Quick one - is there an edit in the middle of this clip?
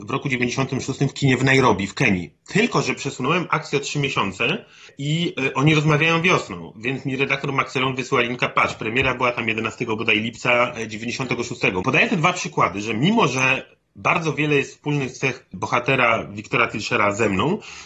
yes; 1 cut; at 11.8 s

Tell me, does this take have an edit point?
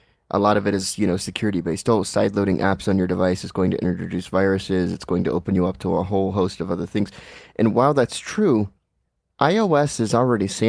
no; 0 cuts

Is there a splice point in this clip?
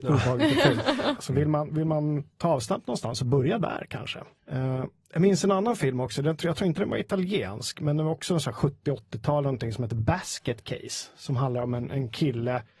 yes; 2 cuts; at 1.2 s, 4.4 s

